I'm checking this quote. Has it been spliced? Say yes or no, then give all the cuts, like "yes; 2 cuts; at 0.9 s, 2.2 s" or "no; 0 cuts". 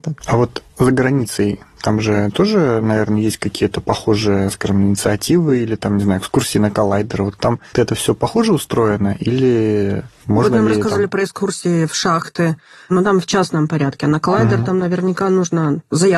yes; 1 cut; at 7.7 s